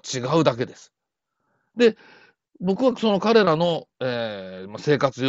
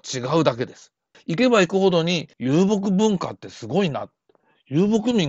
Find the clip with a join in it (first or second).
second